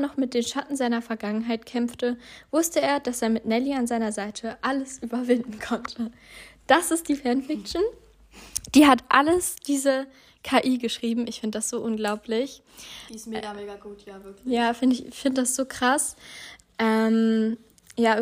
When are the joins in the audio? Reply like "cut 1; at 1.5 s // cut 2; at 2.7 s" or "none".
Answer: none